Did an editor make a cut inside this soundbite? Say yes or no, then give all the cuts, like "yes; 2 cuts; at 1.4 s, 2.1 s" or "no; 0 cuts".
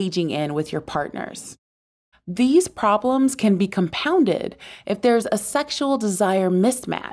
yes; 1 cut; at 2.1 s